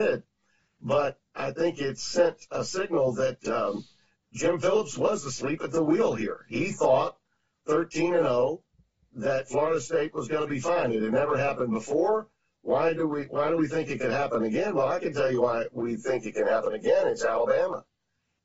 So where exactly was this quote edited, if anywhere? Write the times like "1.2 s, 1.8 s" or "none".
none